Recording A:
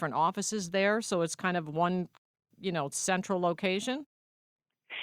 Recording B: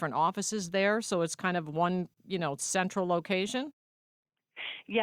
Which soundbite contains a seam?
B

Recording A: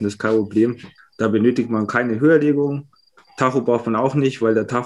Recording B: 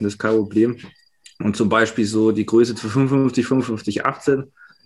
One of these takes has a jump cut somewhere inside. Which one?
A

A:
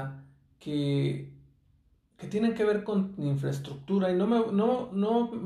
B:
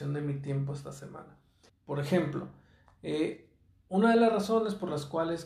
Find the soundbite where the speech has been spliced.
B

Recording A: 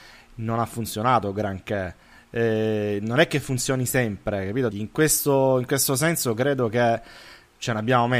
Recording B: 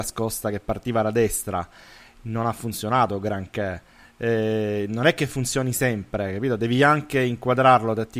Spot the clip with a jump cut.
A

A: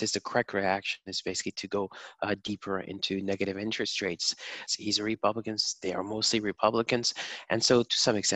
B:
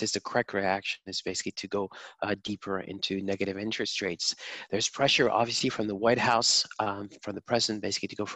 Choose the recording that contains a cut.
A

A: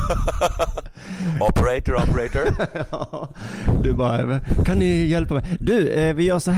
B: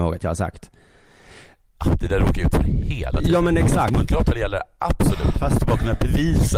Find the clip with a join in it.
B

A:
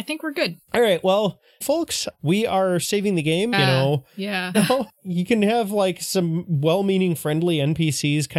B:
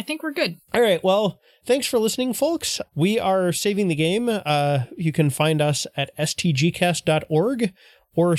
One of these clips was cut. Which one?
A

